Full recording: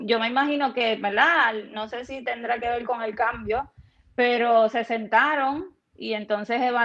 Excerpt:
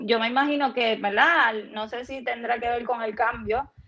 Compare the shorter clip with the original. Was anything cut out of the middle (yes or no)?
no